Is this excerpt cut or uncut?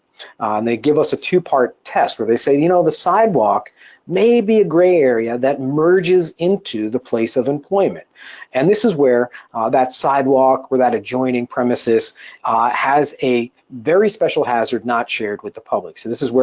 uncut